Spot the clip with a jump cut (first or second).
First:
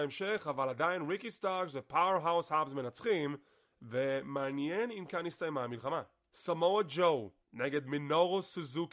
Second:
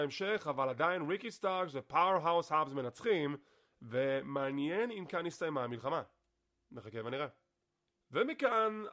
first